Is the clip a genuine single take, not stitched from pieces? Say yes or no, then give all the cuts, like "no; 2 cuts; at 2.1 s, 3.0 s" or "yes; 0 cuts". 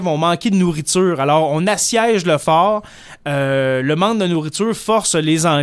yes; 0 cuts